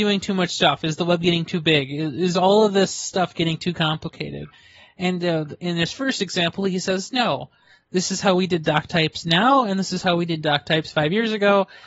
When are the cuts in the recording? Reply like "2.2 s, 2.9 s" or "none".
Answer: none